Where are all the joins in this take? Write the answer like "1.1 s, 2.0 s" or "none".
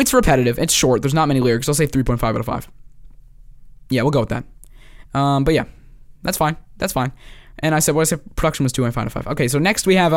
none